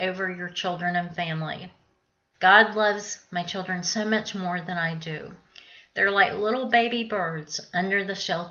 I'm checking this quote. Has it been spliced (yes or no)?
yes